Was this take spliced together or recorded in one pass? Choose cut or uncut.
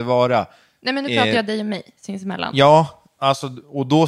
uncut